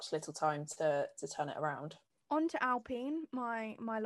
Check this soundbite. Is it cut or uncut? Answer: cut